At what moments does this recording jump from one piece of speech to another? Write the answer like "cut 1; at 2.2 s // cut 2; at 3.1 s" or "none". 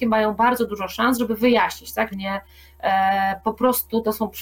cut 1; at 2.1 s